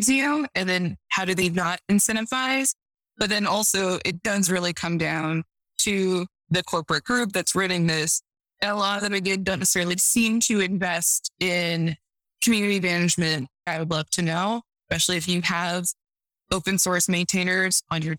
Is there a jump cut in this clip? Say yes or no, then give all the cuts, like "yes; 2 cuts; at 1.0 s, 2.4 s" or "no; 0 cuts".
yes; 1 cut; at 13.7 s